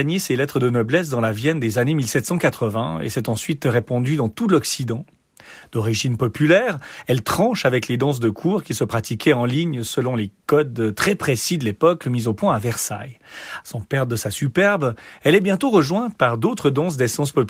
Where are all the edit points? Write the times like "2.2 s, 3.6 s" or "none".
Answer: 13.6 s